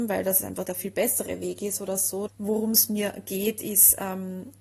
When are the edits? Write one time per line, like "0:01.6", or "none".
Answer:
0:02.3